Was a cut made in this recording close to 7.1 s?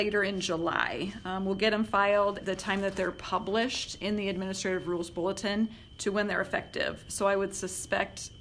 no; 1 cut; at 2.4 s

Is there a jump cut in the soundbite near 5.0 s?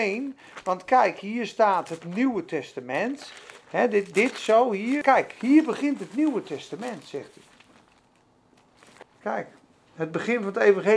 yes; 2 cuts; at 5.0 s, 9.0 s

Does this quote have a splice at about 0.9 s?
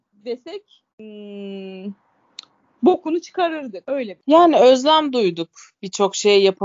yes; 1 cut; at 0.9 s

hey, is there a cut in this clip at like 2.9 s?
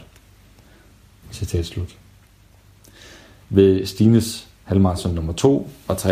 no; 1 cut; at 1.2 s

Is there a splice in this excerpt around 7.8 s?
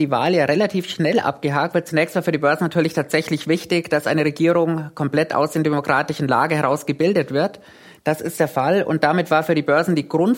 no; 0 cuts

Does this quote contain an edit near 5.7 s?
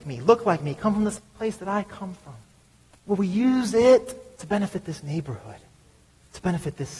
no; 2 cuts; at 2.9 s, 4.3 s

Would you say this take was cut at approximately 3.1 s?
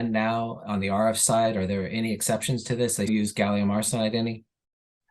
yes; 1 cut; at 3.1 s

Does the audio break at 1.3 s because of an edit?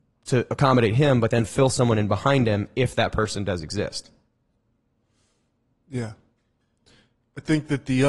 no; 0 cuts

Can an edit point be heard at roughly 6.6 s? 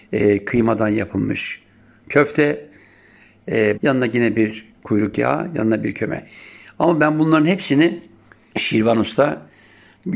no; 2 cuts; at 3.7 s, 8.5 s

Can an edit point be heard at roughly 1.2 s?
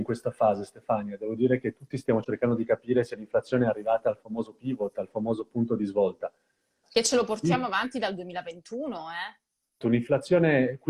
no; 2 cuts; at 6.8 s, 9.8 s

